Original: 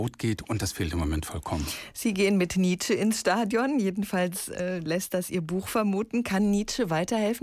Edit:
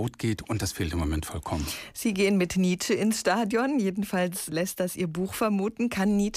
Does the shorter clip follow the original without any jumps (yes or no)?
no